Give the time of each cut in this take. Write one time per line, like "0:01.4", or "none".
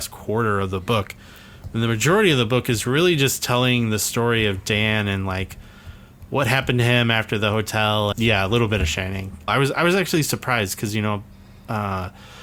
0:08.1
0:09.5